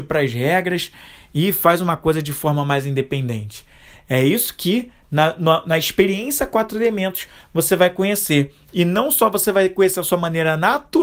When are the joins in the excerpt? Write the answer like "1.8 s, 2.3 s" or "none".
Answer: none